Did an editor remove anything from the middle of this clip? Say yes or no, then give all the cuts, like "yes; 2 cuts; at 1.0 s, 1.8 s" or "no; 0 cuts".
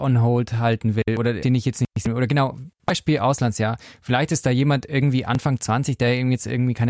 yes; 1 cut; at 1.4 s